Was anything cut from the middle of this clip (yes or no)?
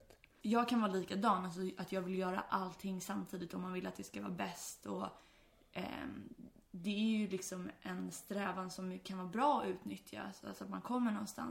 no